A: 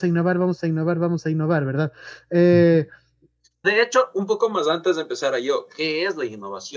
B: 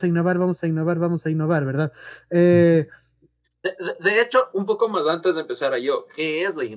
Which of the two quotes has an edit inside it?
A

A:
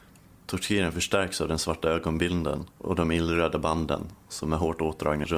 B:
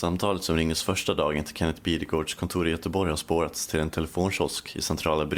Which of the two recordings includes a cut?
A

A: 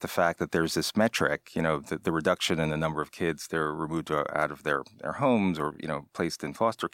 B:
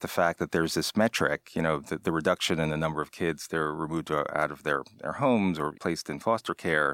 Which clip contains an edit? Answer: B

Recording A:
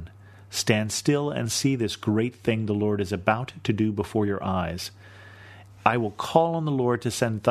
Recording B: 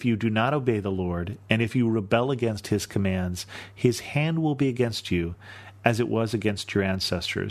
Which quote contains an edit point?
A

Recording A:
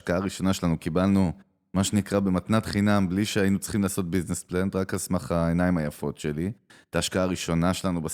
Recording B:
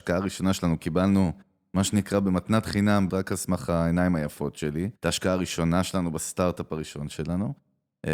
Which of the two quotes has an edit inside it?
B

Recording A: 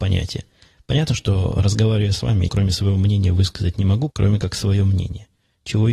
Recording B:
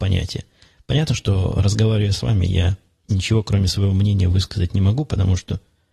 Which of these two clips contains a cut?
A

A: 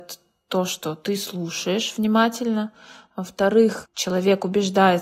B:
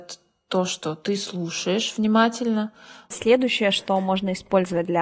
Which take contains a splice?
B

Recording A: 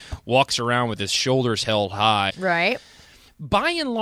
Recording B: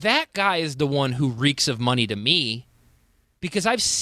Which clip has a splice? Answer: A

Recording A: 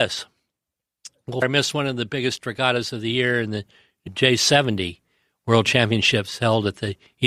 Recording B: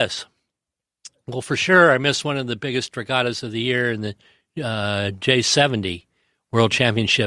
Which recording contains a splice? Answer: A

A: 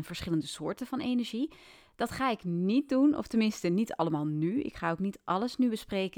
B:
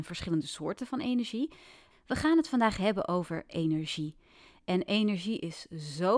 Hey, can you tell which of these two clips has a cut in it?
B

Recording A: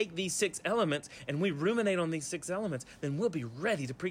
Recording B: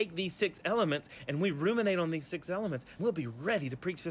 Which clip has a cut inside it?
B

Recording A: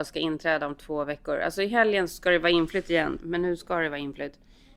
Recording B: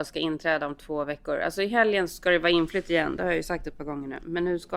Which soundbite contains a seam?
A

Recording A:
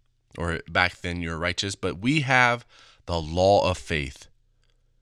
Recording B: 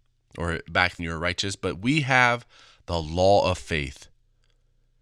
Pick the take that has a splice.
B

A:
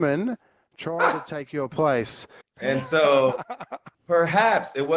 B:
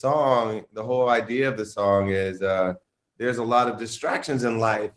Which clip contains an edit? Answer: A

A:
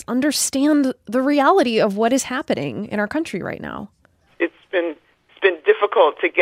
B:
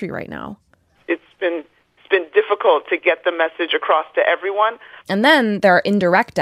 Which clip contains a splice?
B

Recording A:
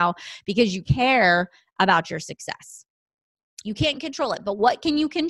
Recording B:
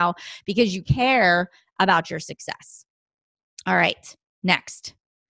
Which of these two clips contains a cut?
A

